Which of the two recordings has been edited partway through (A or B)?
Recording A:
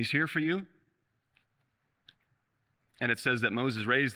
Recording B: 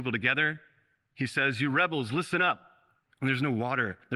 B